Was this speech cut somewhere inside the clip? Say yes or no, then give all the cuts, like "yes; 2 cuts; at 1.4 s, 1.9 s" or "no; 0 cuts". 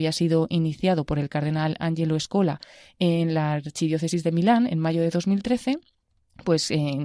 no; 0 cuts